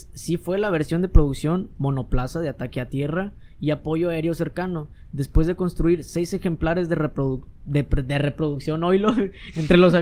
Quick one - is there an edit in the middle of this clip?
no; 0 cuts

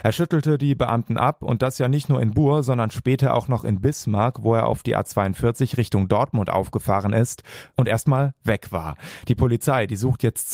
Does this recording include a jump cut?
no; 0 cuts

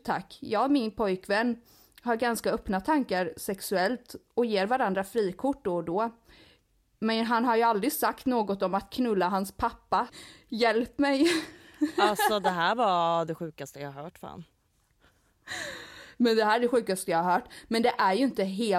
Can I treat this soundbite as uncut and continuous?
no; 1 cut; at 10.1 s

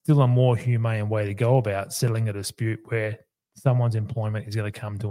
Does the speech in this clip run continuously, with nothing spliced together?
yes; 0 cuts

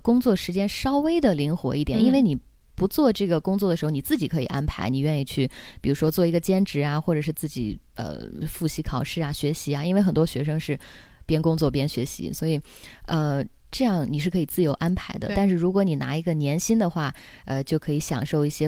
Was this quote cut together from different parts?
no; 0 cuts

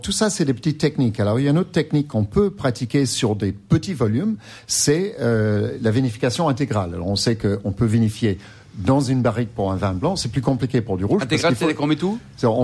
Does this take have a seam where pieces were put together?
no; 0 cuts

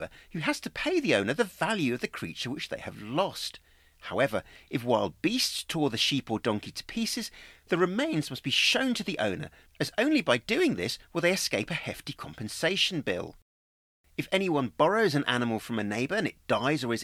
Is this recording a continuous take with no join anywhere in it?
yes; 0 cuts

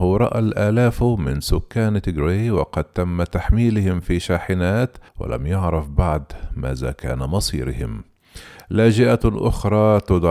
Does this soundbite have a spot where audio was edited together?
yes; 1 cut; at 5.1 s

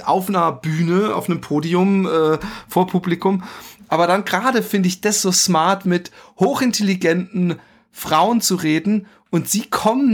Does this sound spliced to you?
yes; 2 cuts; at 3.8 s, 5.8 s

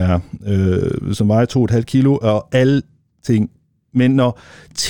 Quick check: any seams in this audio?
no; 0 cuts

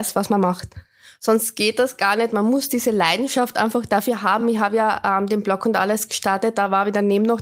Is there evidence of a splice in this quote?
no; 0 cuts

